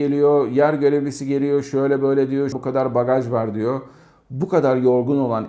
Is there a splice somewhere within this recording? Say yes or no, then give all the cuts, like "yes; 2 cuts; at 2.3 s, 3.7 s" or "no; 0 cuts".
yes; 1 cut; at 2.5 s